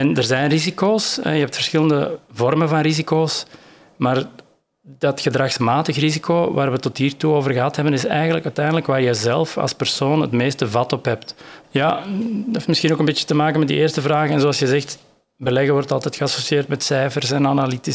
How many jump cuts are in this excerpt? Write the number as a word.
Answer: one